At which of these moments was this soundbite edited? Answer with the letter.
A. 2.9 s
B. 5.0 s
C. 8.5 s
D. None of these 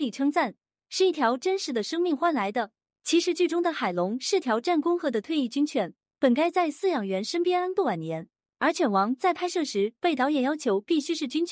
B